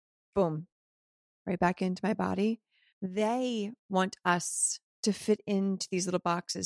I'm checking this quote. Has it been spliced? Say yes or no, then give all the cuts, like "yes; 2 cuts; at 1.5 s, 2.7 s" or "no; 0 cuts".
yes; 2 cuts; at 2.9 s, 4.9 s